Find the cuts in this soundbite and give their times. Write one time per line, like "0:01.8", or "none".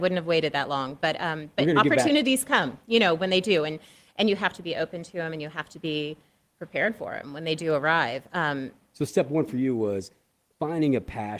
none